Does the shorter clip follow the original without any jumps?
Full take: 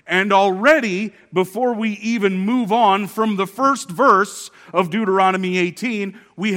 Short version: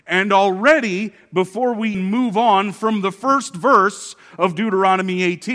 no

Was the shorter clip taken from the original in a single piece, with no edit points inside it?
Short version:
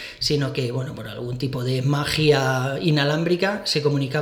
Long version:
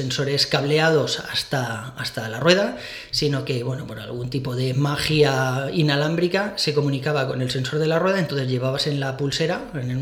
yes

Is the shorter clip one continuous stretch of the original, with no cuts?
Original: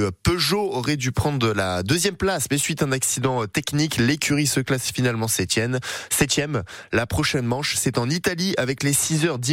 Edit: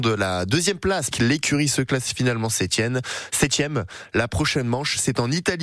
no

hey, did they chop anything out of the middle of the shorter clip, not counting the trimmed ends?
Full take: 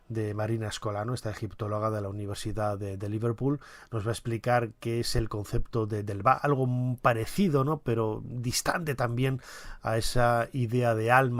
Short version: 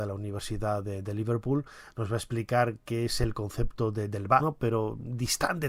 yes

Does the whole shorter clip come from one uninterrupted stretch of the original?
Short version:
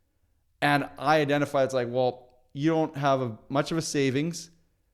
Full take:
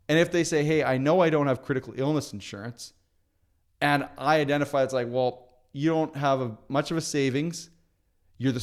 yes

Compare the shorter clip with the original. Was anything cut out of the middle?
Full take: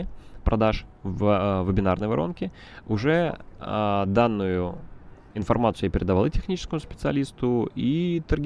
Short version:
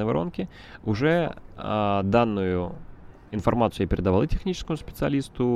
no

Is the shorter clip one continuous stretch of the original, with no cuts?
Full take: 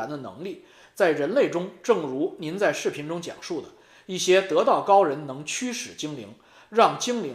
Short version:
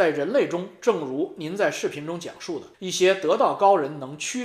no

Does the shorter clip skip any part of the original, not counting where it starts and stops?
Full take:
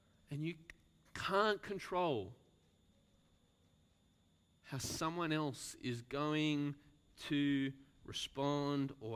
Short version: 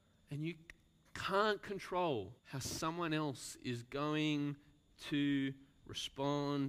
yes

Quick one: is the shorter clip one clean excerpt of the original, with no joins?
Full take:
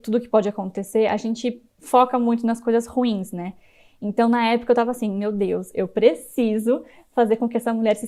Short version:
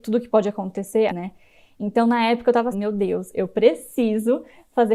no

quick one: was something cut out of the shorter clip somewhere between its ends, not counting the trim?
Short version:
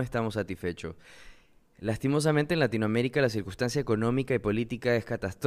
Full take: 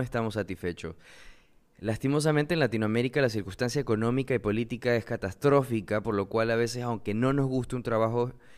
no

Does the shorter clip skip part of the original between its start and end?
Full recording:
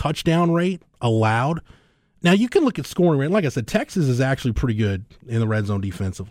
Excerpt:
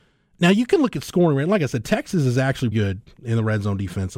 yes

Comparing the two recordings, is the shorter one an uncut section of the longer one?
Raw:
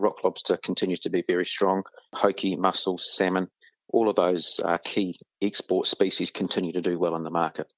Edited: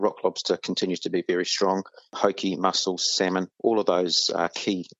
no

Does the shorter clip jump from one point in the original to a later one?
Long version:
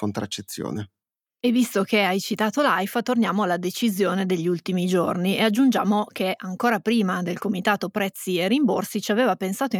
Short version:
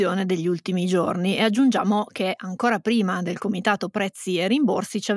no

